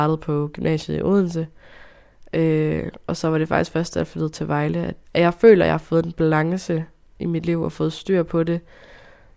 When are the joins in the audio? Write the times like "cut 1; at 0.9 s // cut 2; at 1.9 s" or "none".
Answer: cut 1; at 5.0 s